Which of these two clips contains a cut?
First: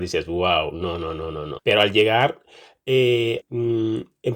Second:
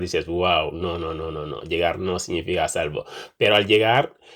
first; 2 cuts; at 1.6 s, 3.4 s

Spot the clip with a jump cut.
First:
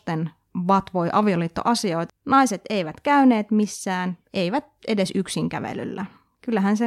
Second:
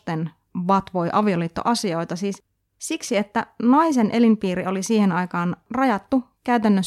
first; 1 cut; at 2.1 s

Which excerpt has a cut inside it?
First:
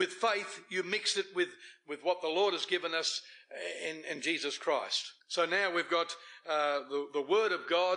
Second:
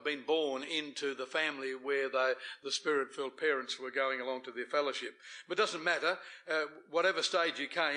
first; 1 cut; at 5.2 s

